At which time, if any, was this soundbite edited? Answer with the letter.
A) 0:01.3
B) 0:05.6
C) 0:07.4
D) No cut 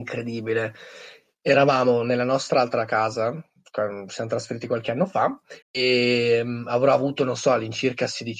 B